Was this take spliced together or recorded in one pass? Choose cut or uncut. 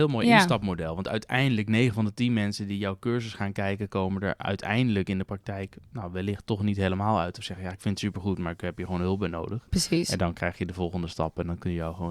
uncut